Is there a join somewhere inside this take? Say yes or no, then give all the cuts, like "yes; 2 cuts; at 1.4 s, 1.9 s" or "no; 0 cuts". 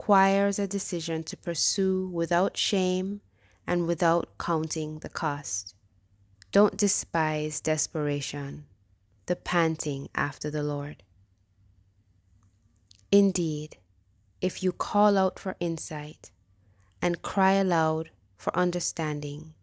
yes; 1 cut; at 6.3 s